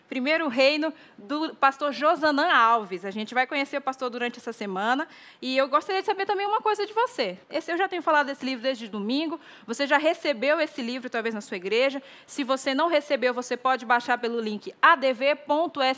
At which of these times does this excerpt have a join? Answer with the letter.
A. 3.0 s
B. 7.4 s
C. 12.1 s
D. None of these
B